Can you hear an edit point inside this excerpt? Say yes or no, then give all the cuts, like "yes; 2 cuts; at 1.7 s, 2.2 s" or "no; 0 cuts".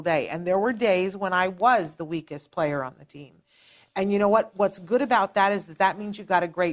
no; 0 cuts